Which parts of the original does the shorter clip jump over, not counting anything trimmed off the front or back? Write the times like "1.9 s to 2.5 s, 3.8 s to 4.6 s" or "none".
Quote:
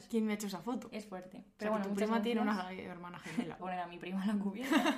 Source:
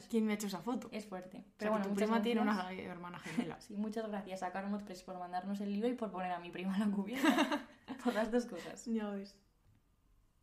3.6 s to 6.1 s

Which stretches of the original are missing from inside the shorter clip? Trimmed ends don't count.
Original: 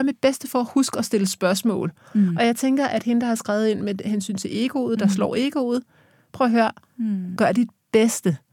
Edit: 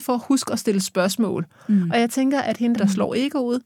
3.2 s to 5.0 s

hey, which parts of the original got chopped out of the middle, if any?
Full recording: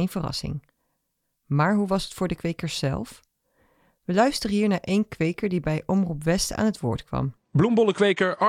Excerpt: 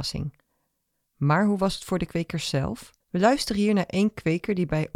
3.3 s to 3.9 s

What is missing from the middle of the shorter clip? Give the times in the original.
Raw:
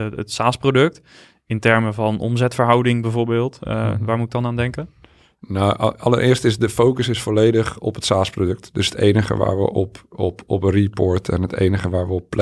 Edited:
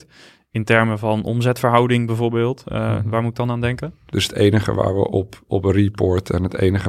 5.0 s to 8.7 s, 10.1 s to 10.4 s

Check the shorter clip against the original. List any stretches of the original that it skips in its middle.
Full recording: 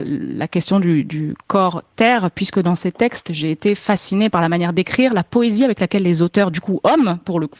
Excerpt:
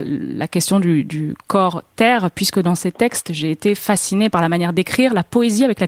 none

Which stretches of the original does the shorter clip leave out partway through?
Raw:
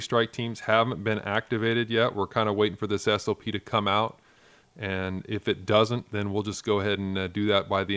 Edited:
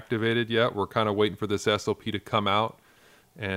none

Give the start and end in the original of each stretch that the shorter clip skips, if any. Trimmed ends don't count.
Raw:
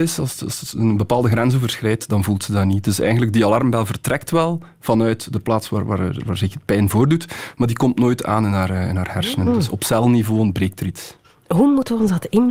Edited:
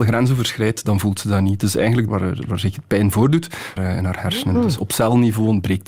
3.3 s to 5.9 s, 7.5 s to 8.7 s

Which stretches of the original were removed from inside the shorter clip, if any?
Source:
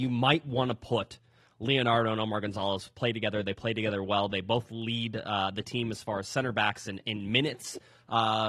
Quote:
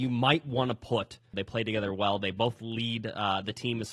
1.3 s to 3.4 s

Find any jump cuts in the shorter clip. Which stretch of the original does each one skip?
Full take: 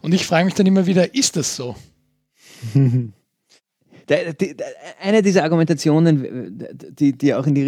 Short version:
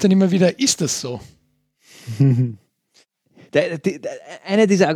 none

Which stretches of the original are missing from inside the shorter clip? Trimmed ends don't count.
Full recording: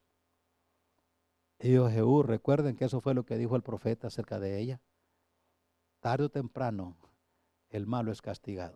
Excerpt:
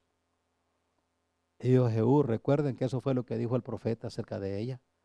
none

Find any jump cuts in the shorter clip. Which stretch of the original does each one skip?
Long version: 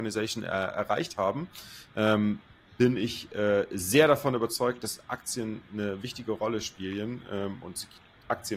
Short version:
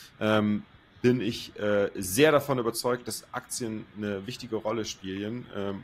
none

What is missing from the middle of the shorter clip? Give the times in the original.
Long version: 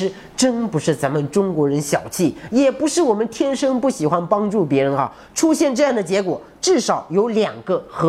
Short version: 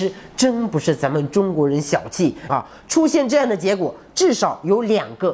2.5 s to 5.0 s

